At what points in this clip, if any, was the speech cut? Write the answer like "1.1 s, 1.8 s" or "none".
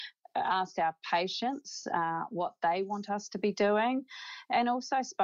none